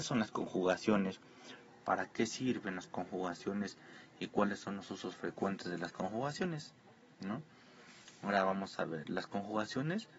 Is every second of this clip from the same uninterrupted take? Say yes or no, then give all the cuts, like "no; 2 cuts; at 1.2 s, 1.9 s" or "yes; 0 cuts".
yes; 0 cuts